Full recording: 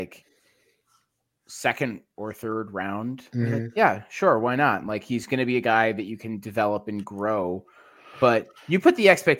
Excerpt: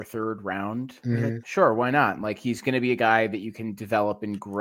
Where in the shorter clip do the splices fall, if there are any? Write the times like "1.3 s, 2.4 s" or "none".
1.4 s